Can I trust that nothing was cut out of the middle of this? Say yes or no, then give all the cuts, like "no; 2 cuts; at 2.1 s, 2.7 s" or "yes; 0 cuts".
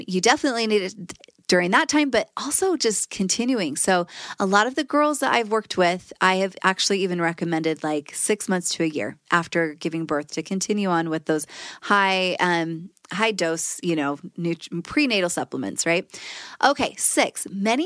yes; 0 cuts